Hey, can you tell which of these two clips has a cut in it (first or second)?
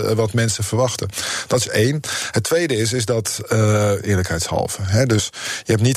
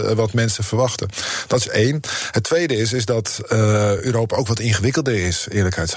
first